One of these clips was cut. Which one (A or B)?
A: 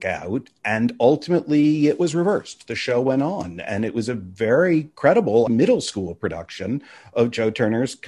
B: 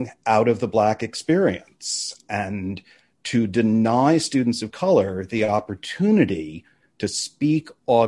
A